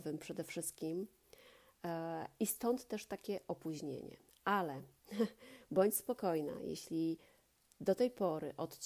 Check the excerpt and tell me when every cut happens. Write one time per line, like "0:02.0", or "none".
none